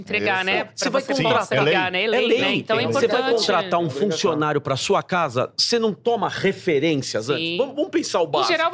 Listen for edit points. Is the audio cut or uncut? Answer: uncut